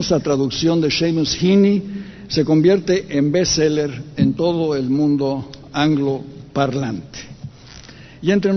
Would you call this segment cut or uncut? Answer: uncut